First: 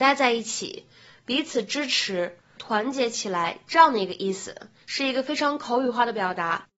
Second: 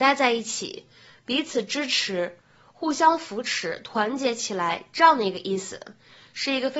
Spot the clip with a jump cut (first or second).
first